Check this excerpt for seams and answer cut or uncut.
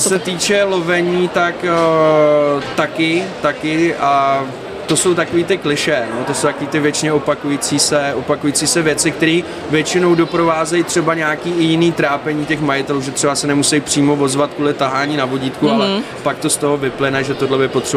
uncut